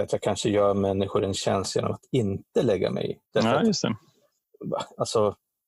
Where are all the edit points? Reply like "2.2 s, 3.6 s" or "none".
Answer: 3.3 s